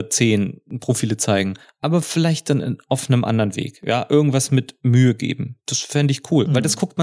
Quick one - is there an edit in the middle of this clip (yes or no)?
no